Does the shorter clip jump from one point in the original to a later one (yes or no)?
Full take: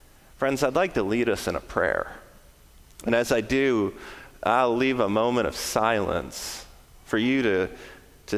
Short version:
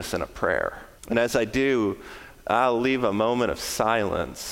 yes